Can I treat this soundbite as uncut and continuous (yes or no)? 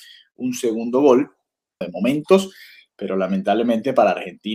no